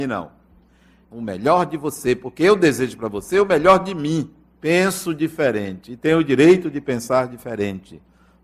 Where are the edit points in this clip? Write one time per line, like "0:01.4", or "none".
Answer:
0:01.0
0:04.5